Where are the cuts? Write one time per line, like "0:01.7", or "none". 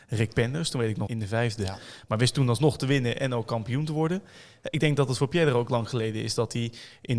0:01.1